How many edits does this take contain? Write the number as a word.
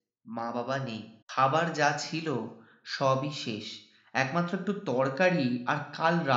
one